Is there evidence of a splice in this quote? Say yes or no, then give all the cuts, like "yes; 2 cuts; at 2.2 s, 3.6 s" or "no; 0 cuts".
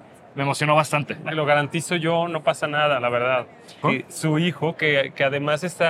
yes; 2 cuts; at 1.2 s, 3.8 s